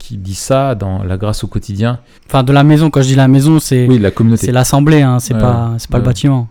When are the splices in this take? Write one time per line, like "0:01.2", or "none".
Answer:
0:02.2